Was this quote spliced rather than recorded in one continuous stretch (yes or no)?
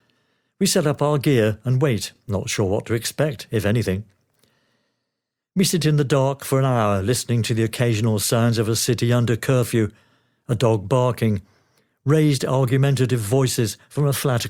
no